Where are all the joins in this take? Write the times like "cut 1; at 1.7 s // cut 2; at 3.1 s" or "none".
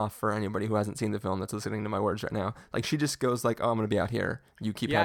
none